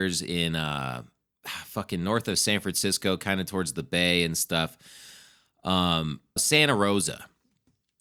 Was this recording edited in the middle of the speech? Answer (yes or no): yes